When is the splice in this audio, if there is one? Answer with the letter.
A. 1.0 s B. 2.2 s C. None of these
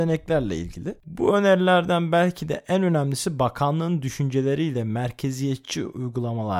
A